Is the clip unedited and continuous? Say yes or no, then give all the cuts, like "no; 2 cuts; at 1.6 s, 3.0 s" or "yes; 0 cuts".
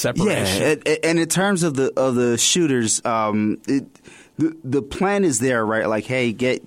no; 1 cut; at 3.0 s